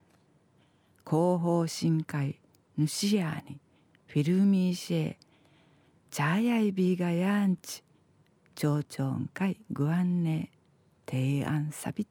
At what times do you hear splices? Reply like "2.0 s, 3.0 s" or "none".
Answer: none